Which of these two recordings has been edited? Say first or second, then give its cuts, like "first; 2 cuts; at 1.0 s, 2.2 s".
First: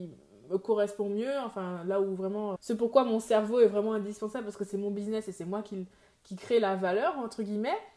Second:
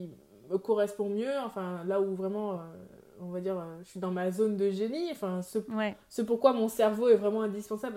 first; 1 cut; at 2.6 s